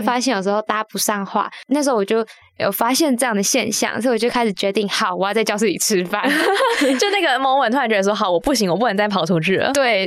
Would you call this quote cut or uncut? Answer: uncut